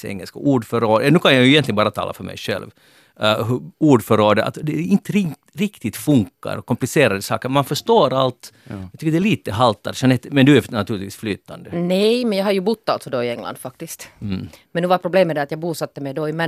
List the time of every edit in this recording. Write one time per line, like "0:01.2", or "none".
none